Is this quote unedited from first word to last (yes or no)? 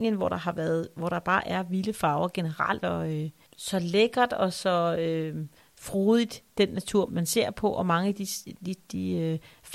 no